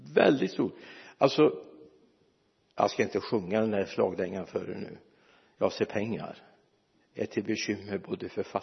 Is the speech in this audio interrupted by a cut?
no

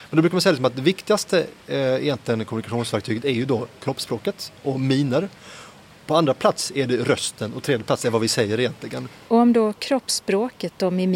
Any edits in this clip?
no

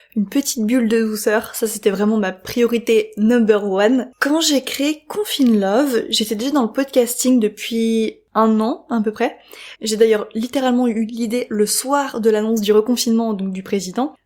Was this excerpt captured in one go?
no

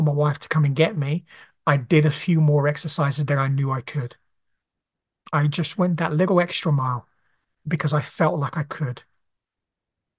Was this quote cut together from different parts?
no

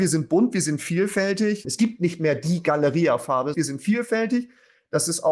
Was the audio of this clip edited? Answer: yes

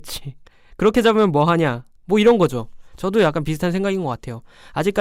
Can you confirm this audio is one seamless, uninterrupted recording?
no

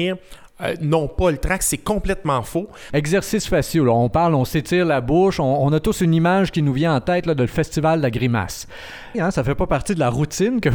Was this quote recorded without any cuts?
no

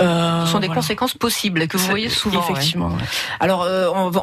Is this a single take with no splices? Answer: yes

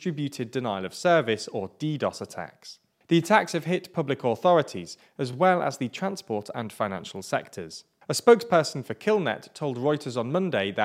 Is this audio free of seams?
yes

